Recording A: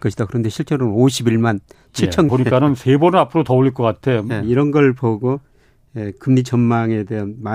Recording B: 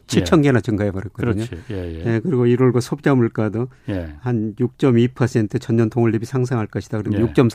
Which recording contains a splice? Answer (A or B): A